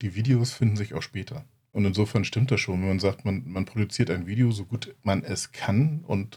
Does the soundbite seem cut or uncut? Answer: uncut